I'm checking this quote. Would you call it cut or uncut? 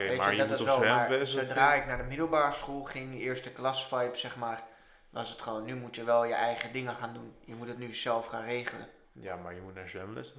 uncut